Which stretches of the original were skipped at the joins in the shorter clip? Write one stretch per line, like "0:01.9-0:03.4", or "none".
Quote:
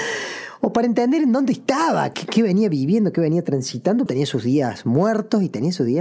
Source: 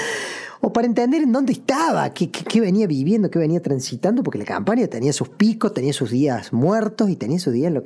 0:02.1-0:02.3
0:04.2-0:05.7

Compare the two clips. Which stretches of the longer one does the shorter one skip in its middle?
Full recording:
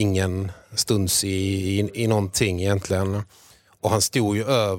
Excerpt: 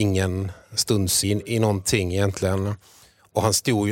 0:01.2-0:01.7

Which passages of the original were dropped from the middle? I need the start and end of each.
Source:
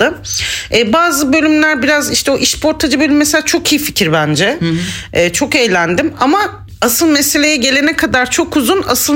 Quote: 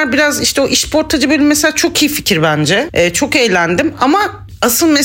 0:04.6-0:05.1

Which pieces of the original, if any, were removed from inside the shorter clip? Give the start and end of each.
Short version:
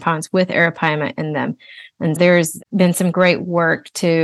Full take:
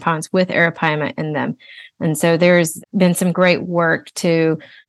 0:02.2-0:02.4

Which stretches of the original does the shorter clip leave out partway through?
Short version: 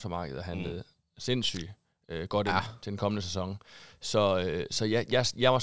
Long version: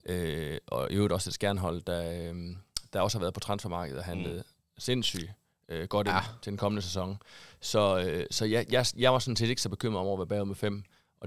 none

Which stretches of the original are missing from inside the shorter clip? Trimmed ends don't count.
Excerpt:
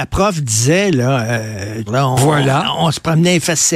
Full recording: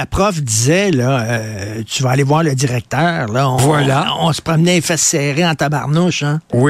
0:01.9-0:03.3

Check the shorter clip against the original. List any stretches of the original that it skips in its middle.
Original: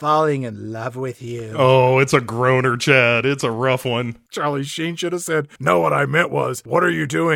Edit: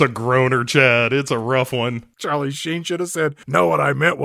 none

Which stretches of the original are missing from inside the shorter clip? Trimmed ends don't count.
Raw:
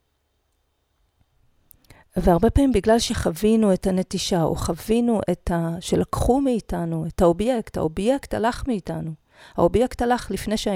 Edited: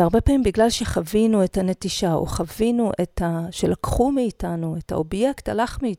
0:07.2-0:07.7

